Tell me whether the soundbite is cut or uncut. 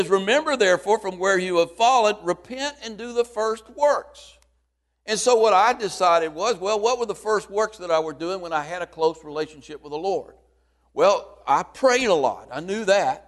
uncut